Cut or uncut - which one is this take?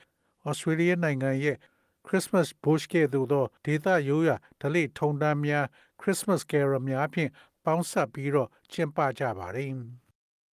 cut